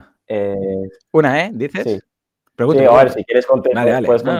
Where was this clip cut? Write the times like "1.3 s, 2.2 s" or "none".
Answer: none